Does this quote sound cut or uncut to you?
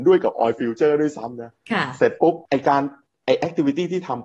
cut